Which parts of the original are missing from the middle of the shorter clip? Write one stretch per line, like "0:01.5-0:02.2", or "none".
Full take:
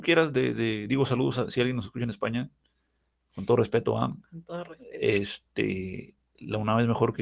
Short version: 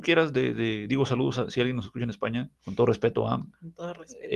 0:02.6-0:03.3